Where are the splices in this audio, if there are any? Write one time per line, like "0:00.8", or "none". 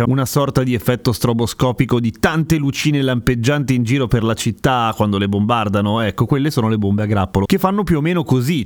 none